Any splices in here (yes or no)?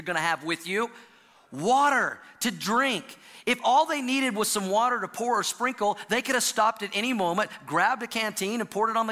no